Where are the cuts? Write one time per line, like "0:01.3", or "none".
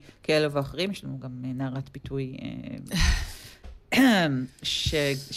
none